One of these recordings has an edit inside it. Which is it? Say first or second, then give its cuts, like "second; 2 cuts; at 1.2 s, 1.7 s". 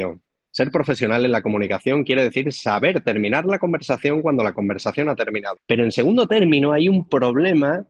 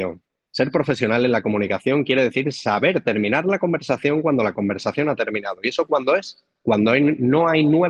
first; 1 cut; at 5.6 s